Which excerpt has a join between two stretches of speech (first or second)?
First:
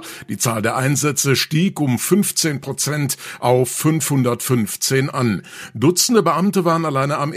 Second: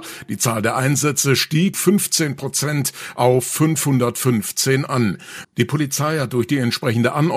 second